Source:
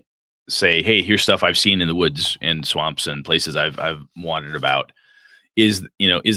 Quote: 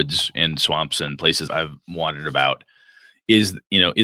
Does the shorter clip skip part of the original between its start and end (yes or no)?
yes